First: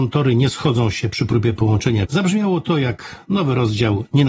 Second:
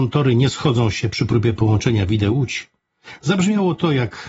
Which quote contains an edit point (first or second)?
first